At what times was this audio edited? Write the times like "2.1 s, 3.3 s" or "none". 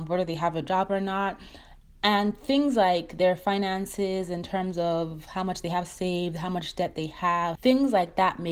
7.5 s